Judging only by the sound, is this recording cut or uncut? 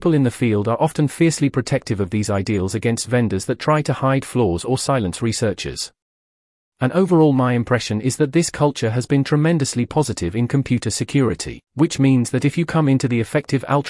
cut